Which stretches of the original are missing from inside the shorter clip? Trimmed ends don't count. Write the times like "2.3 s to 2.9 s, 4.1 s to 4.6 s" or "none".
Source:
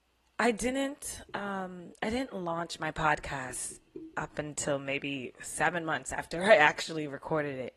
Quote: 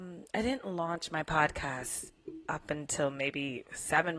none